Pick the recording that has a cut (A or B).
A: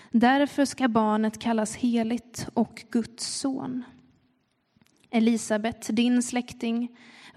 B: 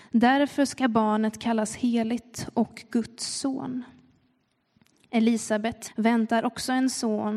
B